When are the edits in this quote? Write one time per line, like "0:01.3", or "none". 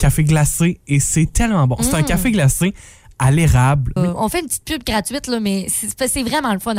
0:04.0